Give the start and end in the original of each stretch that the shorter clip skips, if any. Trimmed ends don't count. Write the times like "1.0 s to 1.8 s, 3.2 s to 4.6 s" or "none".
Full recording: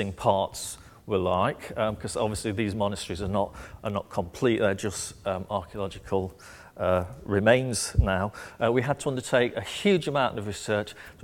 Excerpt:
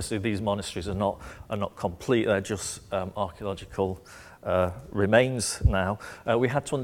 none